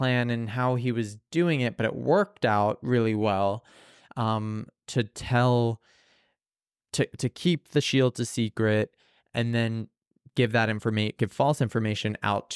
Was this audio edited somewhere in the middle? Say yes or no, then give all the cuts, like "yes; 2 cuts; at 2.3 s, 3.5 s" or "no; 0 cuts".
no; 0 cuts